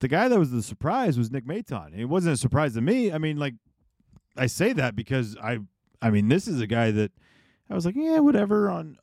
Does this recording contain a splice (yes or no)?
no